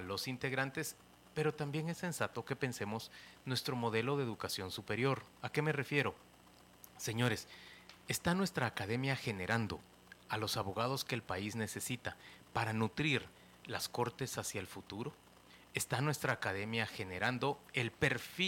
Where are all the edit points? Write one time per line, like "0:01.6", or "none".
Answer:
none